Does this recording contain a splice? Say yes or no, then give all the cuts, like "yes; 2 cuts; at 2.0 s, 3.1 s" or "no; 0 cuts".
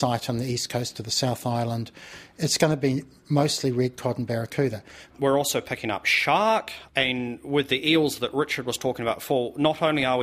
yes; 1 cut; at 5.1 s